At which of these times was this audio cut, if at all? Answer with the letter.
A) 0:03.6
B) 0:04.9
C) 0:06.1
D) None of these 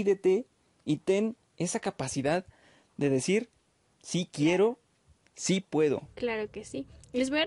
C